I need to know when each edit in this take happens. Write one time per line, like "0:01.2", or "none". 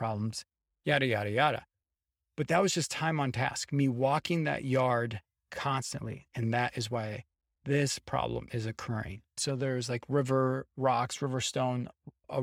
0:06.3
0:09.4